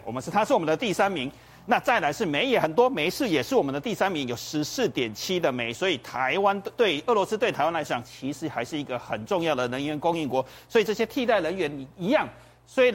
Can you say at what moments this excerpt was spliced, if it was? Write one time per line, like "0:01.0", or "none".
none